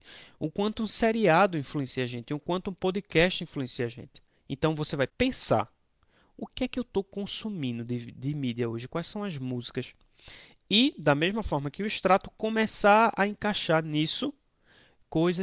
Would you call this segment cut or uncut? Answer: cut